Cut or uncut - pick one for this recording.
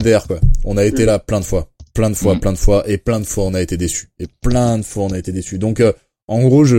uncut